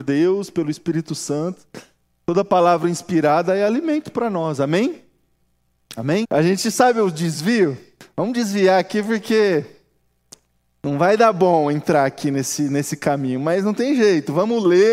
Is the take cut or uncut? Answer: cut